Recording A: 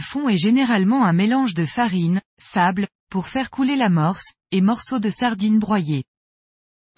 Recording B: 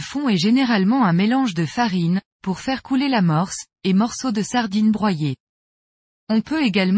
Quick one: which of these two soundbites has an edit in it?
B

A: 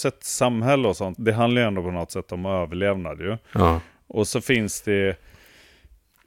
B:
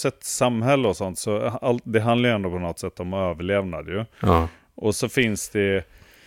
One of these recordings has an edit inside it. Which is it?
A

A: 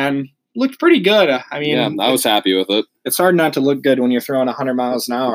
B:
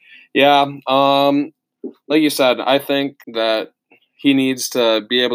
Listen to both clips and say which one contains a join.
B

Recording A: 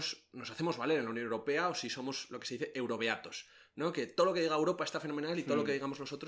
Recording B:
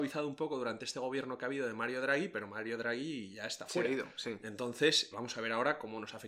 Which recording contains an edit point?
B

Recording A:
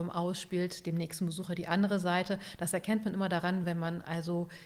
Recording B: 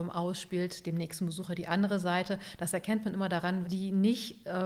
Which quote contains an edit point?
B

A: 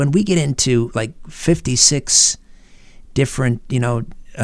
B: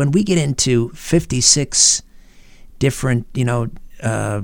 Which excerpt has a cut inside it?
B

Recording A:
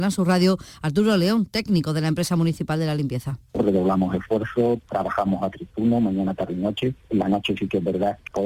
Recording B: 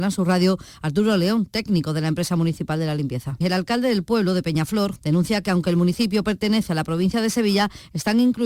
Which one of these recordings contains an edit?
B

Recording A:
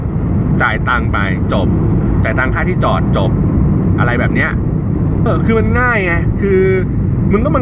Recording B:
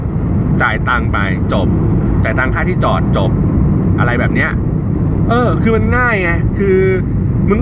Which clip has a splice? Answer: A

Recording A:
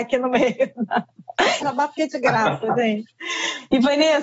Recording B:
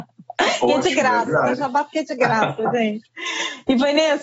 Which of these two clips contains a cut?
A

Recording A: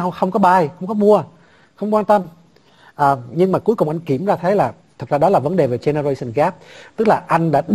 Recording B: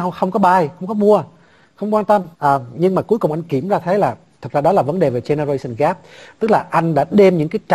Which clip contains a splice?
B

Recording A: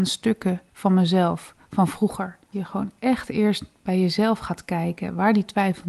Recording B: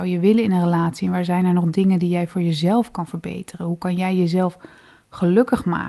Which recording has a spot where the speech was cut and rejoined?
A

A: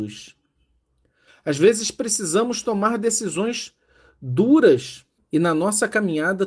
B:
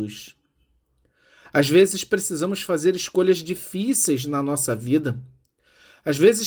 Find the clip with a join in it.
A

